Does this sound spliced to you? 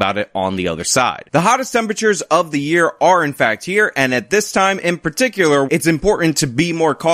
yes; 1 cut; at 5.7 s

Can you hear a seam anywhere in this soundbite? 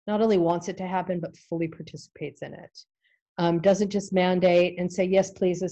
no; 0 cuts

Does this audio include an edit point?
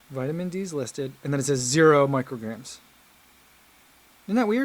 no; 0 cuts

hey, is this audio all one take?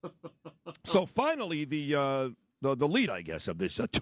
yes; 0 cuts

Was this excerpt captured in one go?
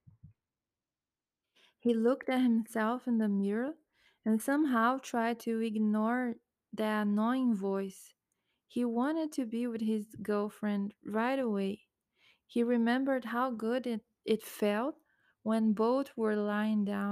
yes; 0 cuts

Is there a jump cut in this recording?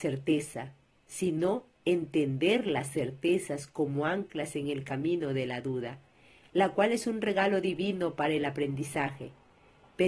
no; 0 cuts

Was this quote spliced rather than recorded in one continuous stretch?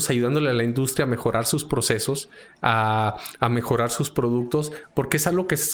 no; 0 cuts

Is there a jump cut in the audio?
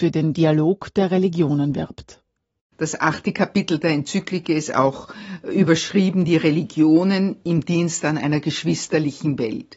no; 0 cuts

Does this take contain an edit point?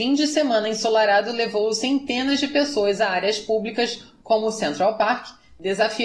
no; 0 cuts

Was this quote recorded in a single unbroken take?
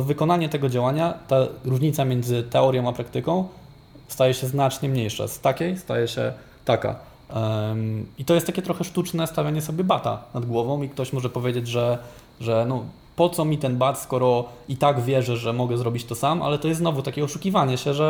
yes; 0 cuts

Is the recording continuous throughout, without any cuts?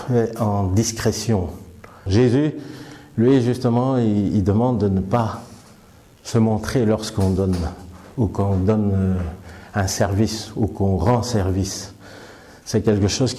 no; 1 cut; at 2.1 s

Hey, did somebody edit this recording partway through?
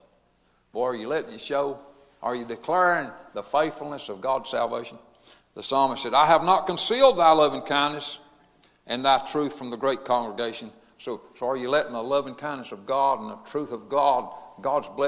no; 0 cuts

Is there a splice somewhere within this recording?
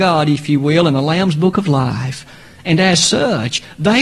no; 0 cuts

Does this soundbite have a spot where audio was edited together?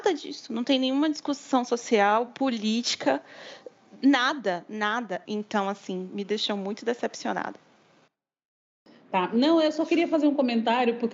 yes; 1 cut; at 5.2 s

